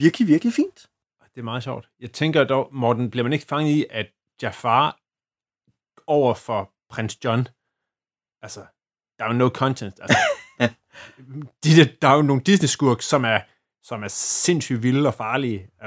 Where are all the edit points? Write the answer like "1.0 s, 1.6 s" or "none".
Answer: none

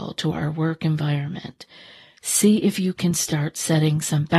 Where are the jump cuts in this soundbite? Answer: none

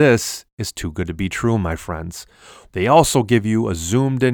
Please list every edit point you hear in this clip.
2.6 s

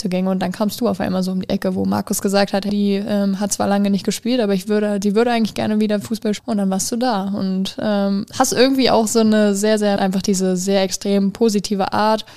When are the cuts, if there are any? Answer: 2.7 s, 6.4 s, 10.0 s

